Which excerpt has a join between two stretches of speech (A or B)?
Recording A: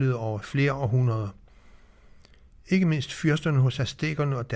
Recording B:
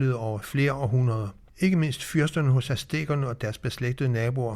B